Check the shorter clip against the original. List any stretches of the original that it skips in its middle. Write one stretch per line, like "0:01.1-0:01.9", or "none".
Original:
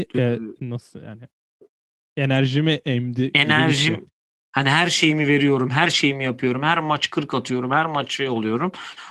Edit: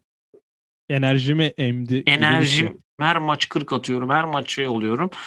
0:04.3-0:06.6